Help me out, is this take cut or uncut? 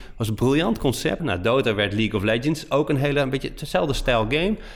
cut